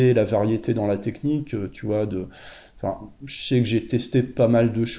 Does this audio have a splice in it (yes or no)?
no